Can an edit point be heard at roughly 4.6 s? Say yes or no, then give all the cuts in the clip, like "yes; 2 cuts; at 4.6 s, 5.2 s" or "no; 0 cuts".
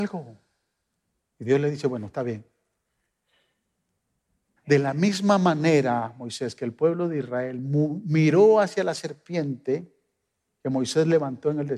yes; 1 cut; at 4.6 s